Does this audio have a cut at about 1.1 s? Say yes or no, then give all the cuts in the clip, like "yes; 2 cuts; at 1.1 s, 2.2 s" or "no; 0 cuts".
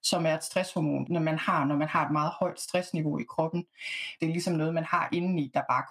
yes; 2 cuts; at 1.1 s, 4.2 s